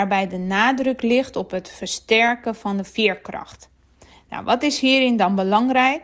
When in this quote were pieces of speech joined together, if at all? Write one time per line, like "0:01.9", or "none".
none